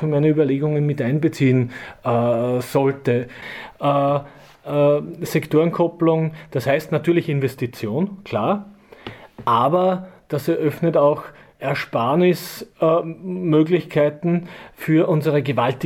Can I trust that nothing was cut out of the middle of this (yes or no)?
no